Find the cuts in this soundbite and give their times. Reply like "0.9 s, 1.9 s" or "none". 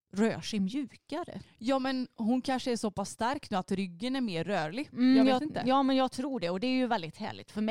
none